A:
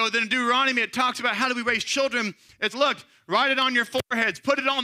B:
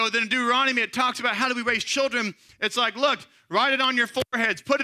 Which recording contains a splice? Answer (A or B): A